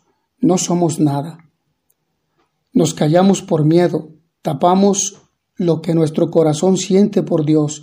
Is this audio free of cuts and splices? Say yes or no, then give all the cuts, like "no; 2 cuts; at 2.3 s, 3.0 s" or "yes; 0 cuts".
yes; 0 cuts